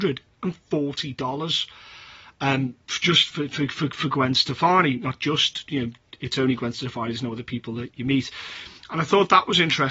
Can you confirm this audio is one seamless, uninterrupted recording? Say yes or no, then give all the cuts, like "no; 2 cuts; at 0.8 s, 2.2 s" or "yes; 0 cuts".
yes; 0 cuts